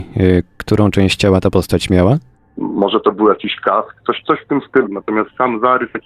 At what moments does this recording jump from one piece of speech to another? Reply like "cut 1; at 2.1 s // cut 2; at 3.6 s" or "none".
cut 1; at 2.6 s // cut 2; at 4.9 s